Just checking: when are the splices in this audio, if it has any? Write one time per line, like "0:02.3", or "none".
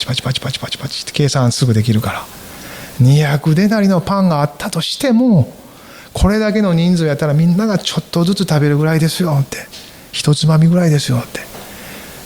none